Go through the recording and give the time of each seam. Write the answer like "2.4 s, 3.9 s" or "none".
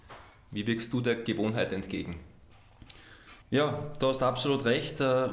3.4 s